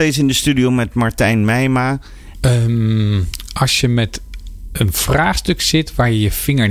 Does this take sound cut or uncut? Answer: cut